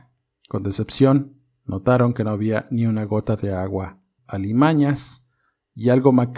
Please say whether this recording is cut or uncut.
cut